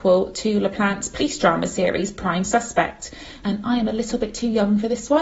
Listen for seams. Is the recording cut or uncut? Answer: cut